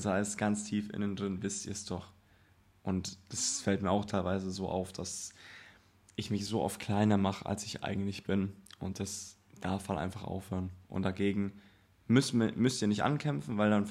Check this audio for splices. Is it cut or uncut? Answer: uncut